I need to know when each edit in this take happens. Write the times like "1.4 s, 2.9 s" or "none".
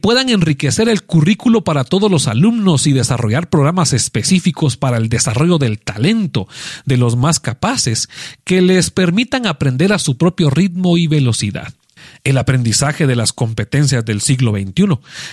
none